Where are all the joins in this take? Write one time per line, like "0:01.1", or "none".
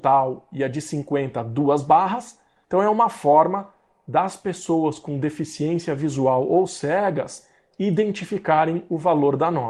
0:02.6